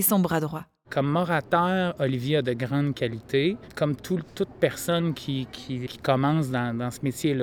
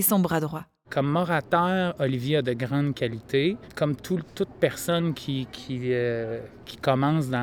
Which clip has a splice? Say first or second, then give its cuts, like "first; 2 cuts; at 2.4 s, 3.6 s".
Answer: first; 1 cut; at 5.9 s